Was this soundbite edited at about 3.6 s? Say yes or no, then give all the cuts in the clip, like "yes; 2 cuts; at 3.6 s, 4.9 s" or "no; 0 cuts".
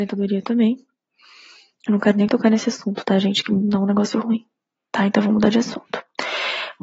yes; 1 cut; at 3.6 s